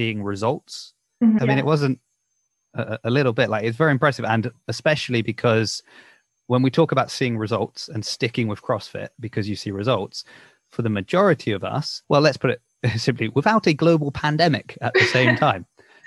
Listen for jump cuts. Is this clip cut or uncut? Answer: cut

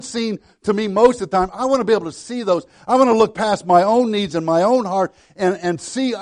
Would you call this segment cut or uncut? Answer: uncut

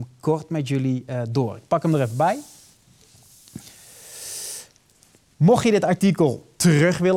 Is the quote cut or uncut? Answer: uncut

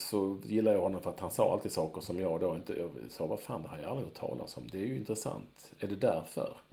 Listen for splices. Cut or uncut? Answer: uncut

